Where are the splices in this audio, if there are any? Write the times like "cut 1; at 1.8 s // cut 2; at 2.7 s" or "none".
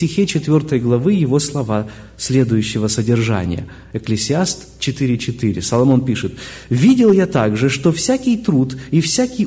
none

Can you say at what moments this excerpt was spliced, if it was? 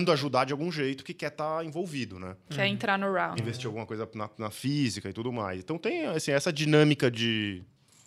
cut 1; at 3.4 s

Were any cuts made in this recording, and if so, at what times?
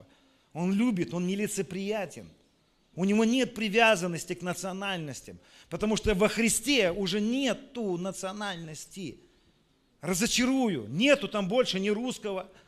cut 1; at 2.9 s // cut 2; at 9.9 s

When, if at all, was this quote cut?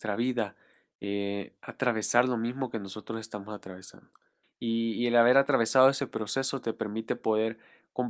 cut 1; at 4.4 s

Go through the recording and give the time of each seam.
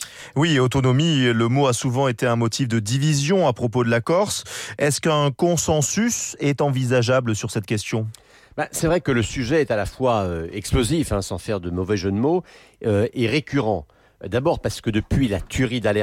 none

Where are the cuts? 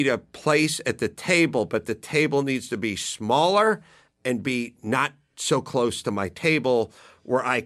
none

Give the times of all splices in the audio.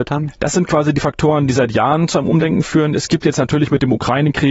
none

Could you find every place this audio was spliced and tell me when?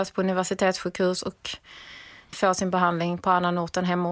cut 1; at 2.3 s

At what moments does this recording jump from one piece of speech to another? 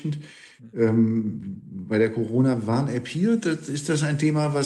none

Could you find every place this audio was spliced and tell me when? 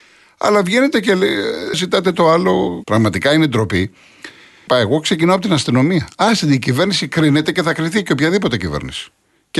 cut 1; at 1.7 s // cut 2; at 2.8 s // cut 3; at 4.7 s

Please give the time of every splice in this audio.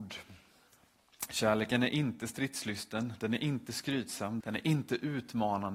cut 1; at 4.4 s

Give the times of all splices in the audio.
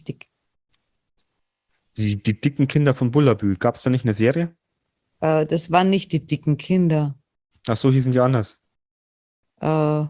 none

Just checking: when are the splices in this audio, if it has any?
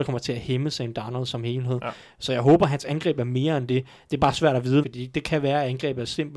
cut 1; at 4.8 s

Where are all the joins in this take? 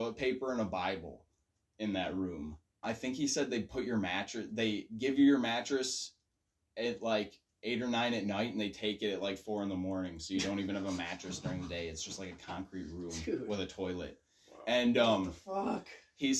cut 1; at 2.8 s

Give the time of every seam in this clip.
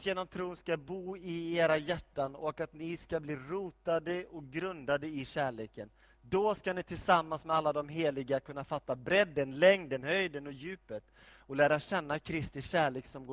none

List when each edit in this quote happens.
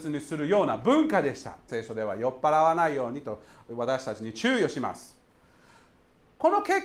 cut 1; at 1.7 s

